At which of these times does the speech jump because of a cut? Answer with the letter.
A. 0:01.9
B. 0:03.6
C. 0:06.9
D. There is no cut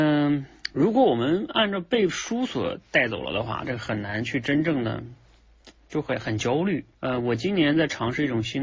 C